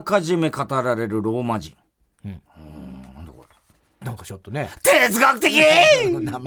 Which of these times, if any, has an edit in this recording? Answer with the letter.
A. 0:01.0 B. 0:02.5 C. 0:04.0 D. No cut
C